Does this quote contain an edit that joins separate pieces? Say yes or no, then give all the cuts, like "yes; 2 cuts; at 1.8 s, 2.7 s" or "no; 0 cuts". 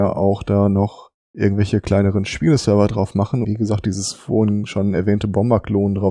yes; 1 cut; at 3.4 s